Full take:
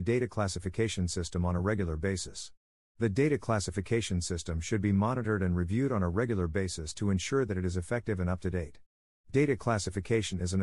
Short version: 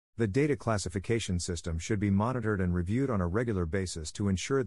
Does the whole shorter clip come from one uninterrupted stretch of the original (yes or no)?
yes